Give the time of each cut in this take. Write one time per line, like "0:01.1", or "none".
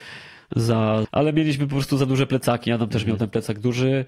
0:01.0